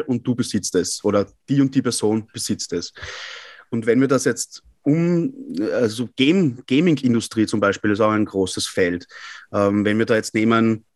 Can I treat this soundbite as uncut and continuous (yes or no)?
yes